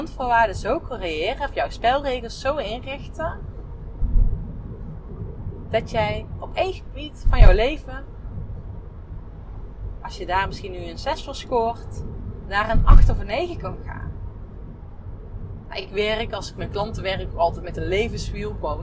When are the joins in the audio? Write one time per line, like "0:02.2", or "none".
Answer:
none